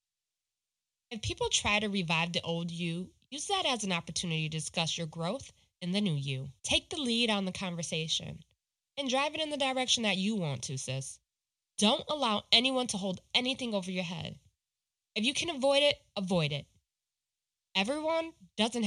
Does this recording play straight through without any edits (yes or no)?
no